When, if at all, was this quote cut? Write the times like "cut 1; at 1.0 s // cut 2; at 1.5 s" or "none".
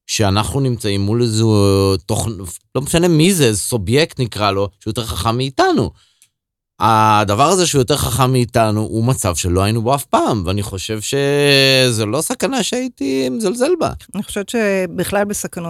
cut 1; at 14.1 s